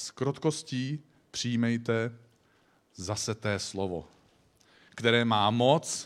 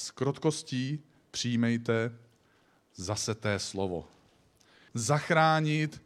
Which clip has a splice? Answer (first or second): second